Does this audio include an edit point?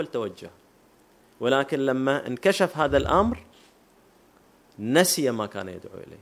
no; 0 cuts

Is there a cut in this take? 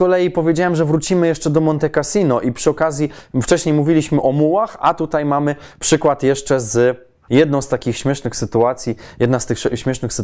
yes; 1 cut; at 7.3 s

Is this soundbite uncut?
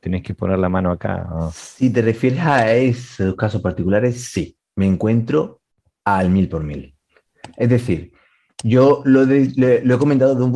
yes; 0 cuts

